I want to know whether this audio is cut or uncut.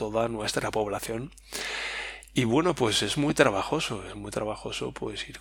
uncut